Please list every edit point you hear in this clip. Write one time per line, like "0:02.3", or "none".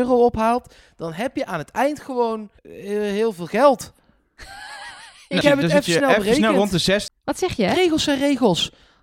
0:02.6
0:05.4
0:07.1